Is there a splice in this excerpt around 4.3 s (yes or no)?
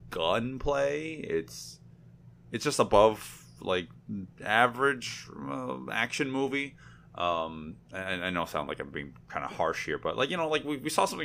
yes